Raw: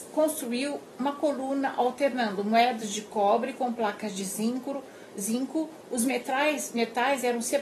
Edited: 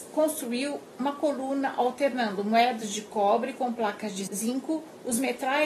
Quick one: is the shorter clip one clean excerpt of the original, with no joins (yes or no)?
no